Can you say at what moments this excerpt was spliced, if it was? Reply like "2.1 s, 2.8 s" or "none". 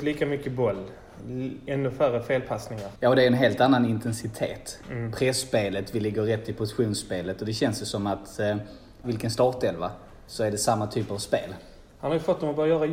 9.0 s

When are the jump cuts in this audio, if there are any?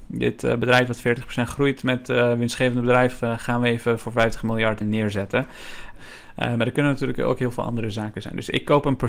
4.8 s, 6.0 s

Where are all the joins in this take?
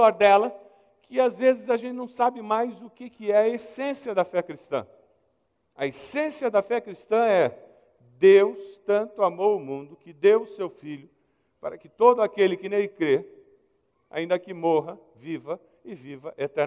none

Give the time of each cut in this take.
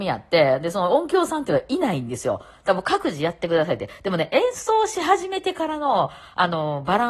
none

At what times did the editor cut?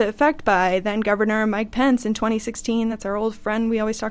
none

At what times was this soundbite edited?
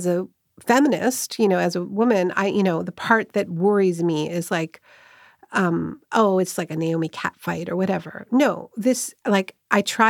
none

